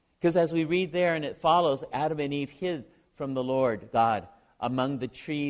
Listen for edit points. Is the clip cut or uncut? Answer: cut